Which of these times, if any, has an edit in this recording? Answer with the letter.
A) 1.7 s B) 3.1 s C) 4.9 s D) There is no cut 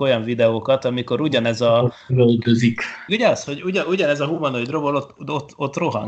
B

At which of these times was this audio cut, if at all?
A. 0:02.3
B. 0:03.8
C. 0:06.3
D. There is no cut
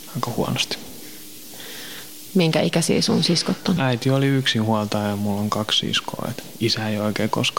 B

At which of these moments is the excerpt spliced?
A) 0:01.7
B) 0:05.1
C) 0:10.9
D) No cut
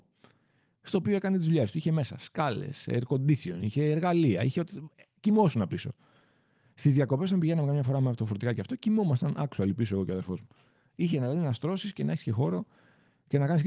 D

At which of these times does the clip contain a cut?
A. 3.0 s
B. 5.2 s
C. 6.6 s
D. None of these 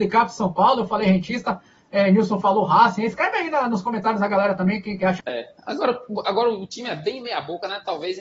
B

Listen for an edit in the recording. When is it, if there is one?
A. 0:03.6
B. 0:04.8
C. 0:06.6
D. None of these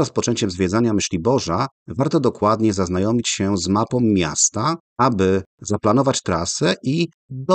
B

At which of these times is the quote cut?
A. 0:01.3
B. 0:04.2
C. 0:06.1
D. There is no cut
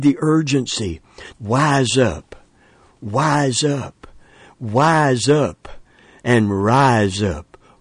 A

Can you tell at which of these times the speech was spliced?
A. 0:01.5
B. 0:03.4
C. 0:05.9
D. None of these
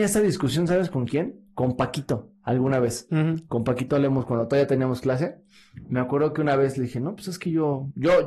D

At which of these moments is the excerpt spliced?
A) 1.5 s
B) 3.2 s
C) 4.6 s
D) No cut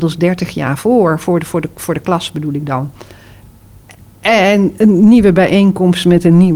D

